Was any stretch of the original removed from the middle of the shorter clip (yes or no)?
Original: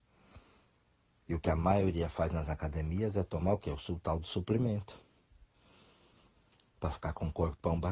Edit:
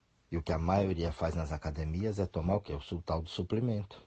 no